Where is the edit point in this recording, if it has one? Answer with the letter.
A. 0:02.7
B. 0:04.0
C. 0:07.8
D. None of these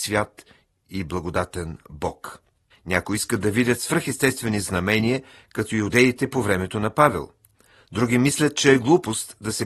A